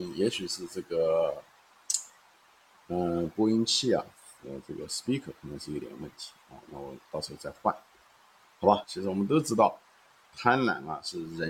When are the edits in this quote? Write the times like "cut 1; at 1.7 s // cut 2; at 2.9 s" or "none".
cut 1; at 8.8 s